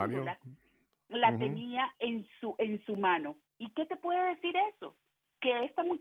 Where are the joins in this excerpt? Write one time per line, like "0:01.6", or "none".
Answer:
0:03.5

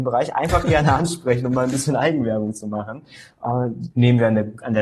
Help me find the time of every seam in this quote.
0:03.9

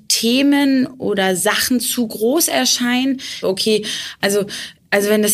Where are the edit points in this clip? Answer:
0:03.4

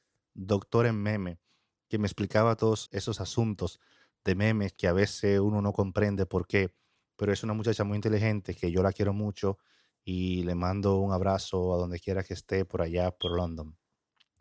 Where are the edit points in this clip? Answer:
0:02.8
0:04.8

